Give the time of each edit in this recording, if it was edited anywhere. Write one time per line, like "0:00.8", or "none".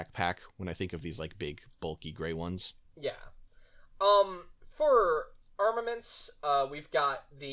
0:02.8